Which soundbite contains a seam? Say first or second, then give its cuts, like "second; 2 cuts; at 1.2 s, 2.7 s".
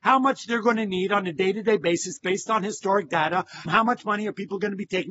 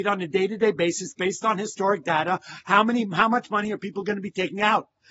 first; 1 cut; at 3.7 s